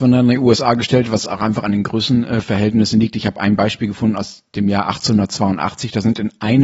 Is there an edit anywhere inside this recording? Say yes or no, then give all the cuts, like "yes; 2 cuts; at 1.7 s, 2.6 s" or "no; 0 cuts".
no; 0 cuts